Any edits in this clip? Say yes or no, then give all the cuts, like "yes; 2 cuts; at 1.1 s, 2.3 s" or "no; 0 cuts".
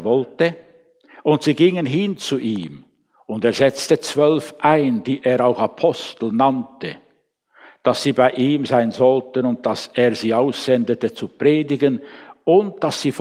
no; 0 cuts